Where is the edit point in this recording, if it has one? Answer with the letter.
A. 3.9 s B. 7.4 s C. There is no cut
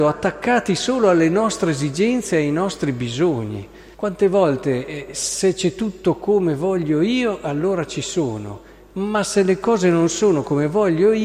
A